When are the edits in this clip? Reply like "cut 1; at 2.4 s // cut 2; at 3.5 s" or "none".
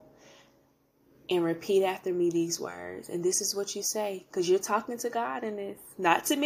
none

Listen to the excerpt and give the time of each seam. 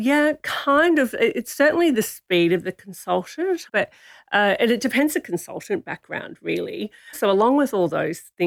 cut 1; at 3.7 s // cut 2; at 7.1 s

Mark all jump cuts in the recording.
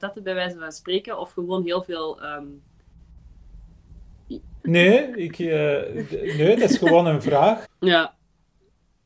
cut 1; at 4.6 s // cut 2; at 7.6 s

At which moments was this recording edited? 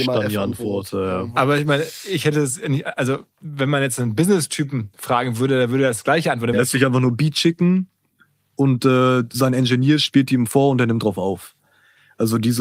cut 1; at 6.5 s

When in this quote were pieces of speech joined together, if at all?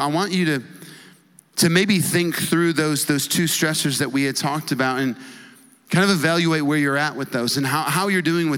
none

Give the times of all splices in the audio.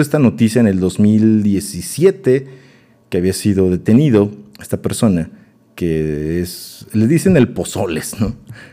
none

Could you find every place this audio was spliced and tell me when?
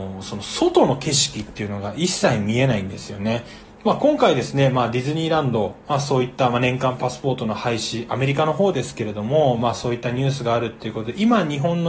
cut 1; at 3.6 s

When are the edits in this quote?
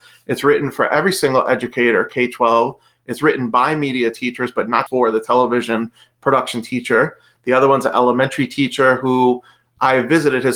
cut 1; at 4.9 s // cut 2; at 7.4 s

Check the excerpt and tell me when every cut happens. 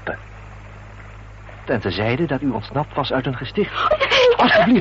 cut 1; at 1.6 s

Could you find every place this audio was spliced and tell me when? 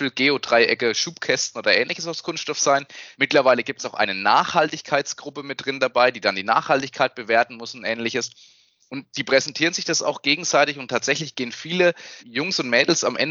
cut 1; at 3.1 s // cut 2; at 12.2 s

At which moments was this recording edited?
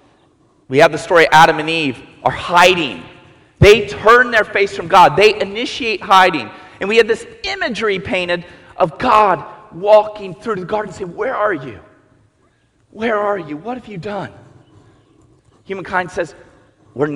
none

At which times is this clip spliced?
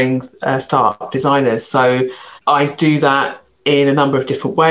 cut 1; at 2.4 s

